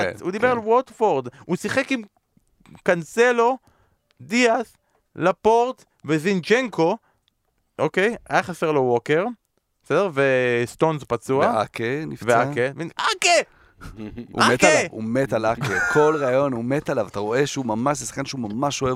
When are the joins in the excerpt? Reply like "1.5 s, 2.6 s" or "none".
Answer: 12.9 s